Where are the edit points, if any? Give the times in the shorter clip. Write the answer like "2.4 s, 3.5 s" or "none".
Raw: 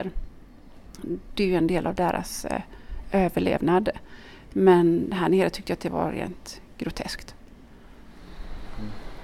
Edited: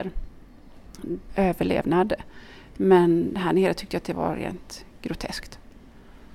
1.3 s